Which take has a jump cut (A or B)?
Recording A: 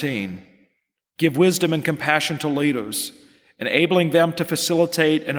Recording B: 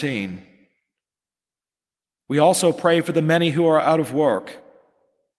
A